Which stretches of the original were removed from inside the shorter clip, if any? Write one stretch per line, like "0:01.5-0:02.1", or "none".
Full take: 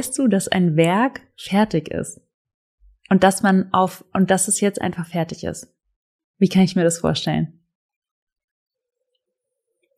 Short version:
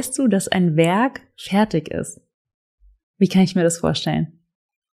0:03.0-0:06.2